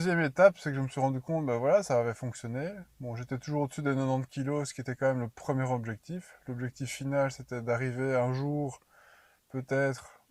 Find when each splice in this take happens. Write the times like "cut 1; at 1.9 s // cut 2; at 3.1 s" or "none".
none

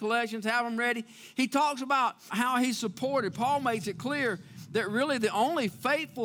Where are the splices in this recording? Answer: cut 1; at 2.3 s

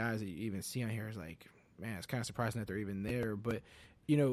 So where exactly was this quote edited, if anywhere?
none

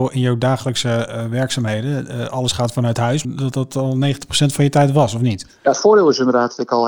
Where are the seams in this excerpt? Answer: cut 1; at 3.2 s

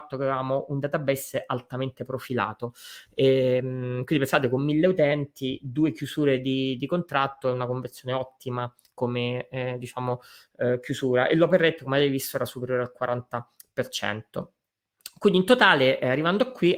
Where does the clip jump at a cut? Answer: none

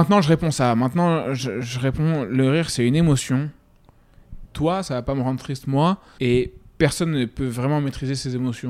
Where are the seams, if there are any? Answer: cut 1; at 4.5 s // cut 2; at 6.2 s

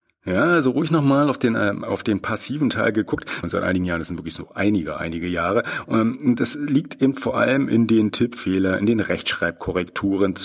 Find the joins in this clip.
cut 1; at 3.4 s

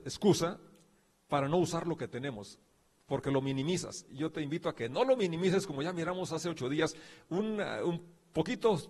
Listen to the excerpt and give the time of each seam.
none

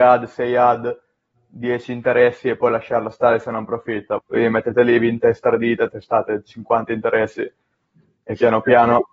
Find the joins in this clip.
cut 1; at 4.2 s // cut 2; at 5.9 s

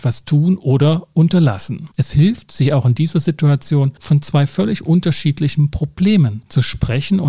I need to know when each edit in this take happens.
cut 1; at 1.9 s

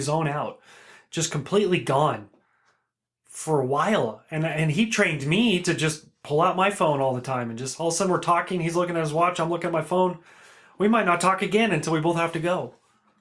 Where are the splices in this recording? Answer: none

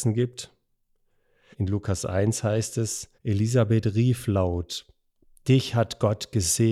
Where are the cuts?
cut 1; at 1.5 s // cut 2; at 3.1 s

